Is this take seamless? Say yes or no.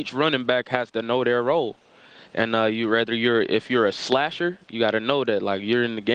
yes